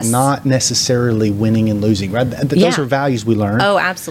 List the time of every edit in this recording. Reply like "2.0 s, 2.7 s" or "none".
none